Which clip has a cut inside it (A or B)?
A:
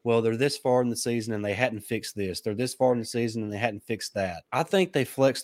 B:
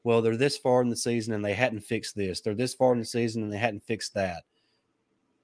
A